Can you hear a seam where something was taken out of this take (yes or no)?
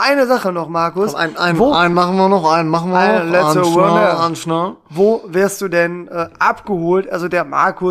no